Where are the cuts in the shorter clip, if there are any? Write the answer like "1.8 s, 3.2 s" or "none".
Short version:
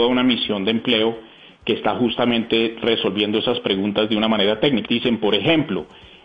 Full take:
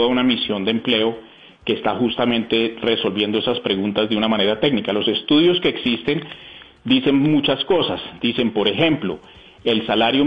4.9 s

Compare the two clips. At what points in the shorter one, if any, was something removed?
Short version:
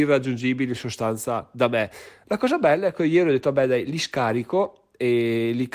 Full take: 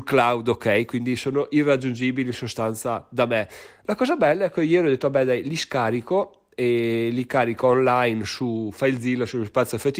none

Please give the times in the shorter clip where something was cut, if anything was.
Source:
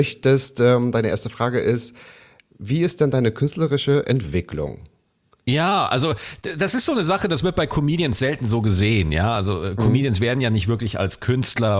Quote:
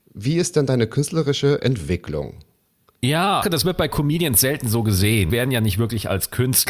3.4 s, 5.3 s

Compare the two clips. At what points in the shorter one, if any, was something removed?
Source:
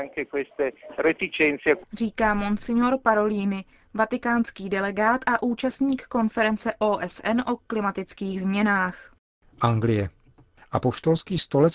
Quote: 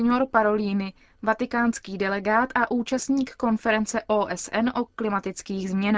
none

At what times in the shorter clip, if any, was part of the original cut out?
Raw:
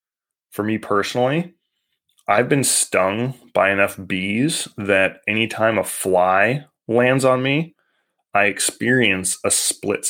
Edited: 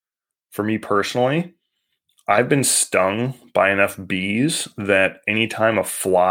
none

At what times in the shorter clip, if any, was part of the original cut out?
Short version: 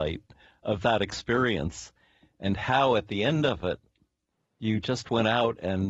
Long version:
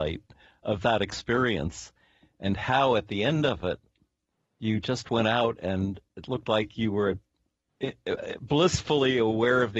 none

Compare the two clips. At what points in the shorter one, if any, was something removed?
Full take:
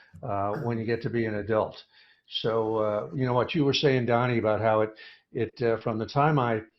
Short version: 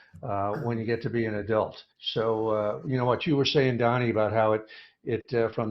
1.9 s

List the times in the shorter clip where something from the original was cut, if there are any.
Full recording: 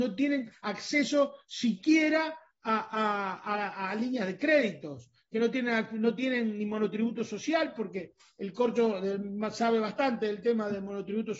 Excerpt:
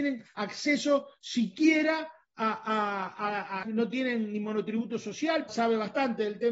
3.6 s, 5.5 s

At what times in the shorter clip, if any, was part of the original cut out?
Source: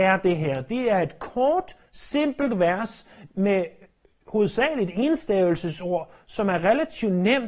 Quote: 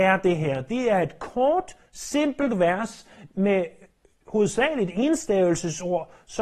none

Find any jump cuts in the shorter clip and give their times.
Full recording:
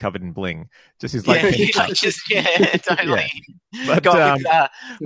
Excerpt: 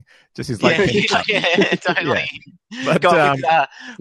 1.2 s

